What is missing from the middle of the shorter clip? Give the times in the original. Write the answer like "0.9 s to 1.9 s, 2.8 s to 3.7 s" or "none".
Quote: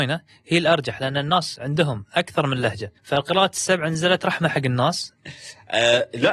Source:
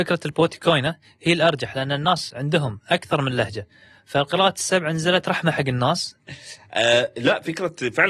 3.7 s to 4.0 s